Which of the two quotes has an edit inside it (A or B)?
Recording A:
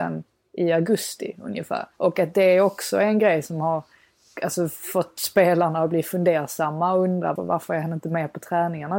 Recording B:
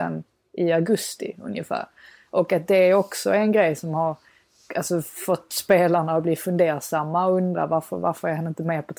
A